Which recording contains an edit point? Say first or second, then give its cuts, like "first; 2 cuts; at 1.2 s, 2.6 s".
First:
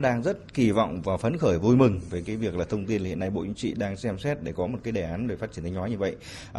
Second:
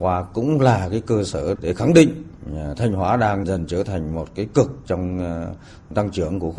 second; 2 cuts; at 1.6 s, 3.4 s